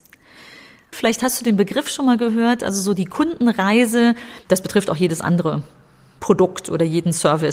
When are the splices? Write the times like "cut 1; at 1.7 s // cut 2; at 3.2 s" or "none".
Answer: cut 1; at 0.9 s // cut 2; at 4.4 s